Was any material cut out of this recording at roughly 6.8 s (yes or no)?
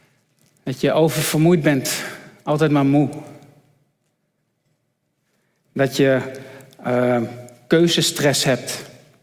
no